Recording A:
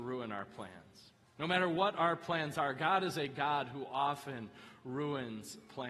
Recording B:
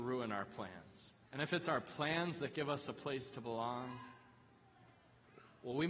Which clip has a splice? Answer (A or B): B